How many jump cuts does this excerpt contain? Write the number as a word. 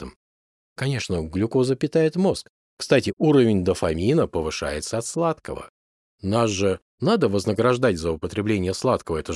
zero